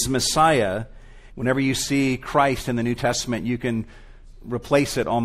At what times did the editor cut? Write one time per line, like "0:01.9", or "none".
0:01.3
0:04.3